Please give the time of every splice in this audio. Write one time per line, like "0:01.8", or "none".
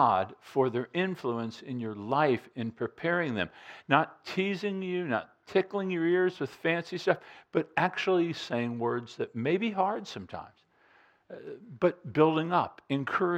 none